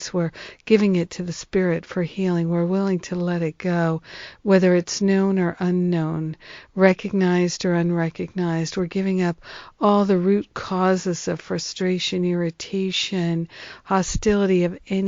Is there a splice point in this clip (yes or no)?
no